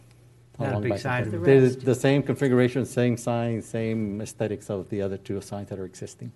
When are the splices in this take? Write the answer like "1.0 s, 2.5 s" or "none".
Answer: 1.2 s